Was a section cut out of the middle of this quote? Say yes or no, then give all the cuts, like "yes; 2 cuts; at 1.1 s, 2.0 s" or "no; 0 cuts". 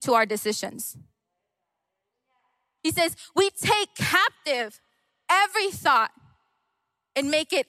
yes; 1 cut; at 2.8 s